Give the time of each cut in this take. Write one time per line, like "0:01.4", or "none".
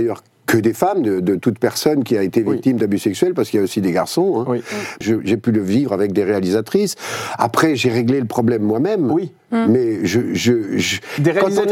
0:05.0